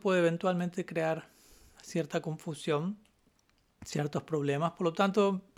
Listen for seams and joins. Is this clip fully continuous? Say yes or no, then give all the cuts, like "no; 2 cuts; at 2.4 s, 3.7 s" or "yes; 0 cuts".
yes; 0 cuts